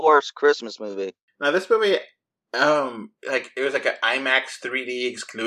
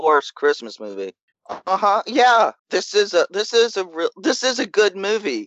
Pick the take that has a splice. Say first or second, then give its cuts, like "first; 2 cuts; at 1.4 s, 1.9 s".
second; 2 cuts; at 1.3 s, 2.6 s